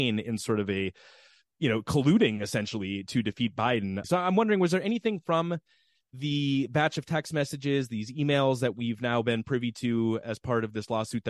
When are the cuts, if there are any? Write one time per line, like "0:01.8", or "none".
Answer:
0:04.0